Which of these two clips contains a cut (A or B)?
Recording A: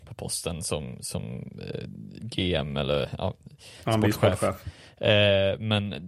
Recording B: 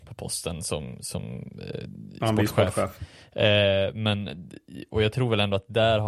B